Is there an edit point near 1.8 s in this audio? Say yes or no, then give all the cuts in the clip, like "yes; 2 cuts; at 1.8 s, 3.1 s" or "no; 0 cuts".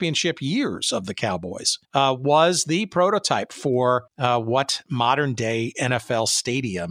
yes; 2 cuts; at 1.8 s, 4.1 s